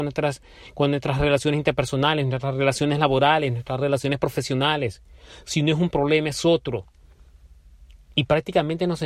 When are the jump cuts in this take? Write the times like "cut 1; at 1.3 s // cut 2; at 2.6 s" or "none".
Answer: none